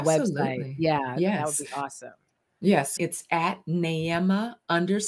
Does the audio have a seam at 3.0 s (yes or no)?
yes